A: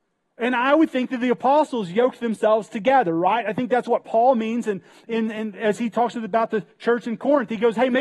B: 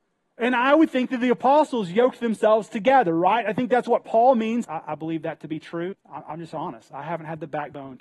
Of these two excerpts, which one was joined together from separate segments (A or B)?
B